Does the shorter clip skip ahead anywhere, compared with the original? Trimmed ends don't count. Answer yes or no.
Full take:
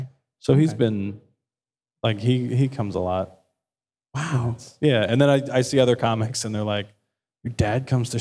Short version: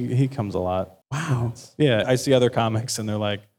yes